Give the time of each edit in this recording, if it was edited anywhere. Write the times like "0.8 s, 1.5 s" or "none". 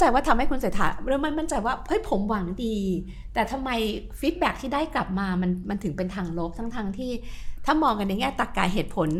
none

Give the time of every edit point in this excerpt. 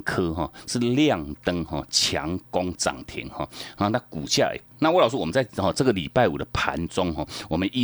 4.7 s

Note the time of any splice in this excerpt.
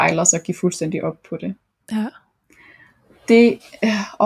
1.8 s

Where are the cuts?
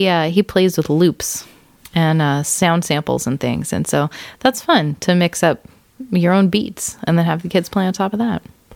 none

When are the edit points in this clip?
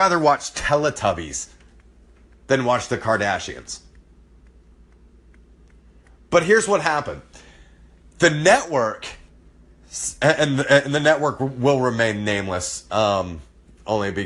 none

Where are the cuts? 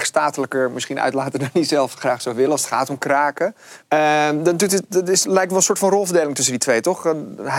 3.8 s

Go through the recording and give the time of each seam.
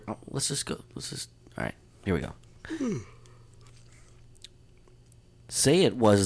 none

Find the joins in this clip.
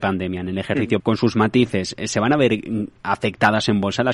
1.0 s

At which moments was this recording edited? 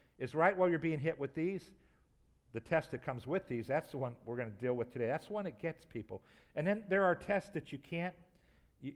none

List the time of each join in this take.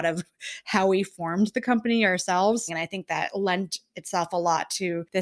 2.7 s

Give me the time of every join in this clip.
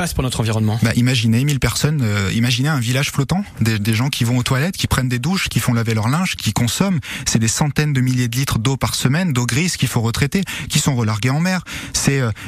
6.4 s

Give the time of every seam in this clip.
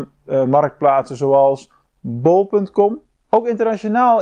3.3 s

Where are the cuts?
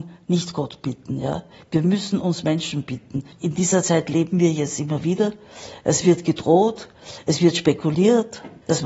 none

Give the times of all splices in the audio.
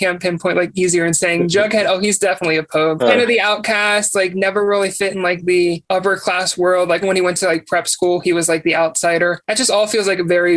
3.0 s, 7.0 s

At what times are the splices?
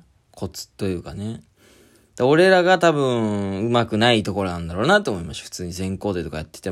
none

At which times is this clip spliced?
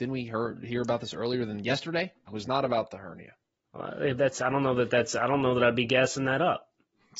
2.3 s

